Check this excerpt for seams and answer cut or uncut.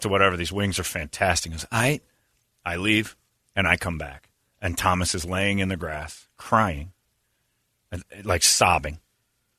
uncut